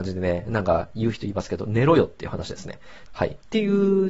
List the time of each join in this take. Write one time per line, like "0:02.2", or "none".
0:03.1